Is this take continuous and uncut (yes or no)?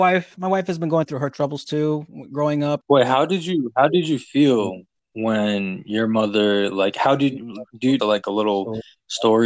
no